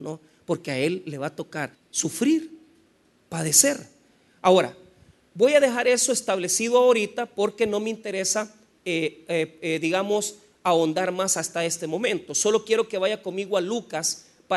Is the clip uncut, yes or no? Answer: no